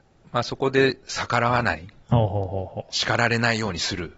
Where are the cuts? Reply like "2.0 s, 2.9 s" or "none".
none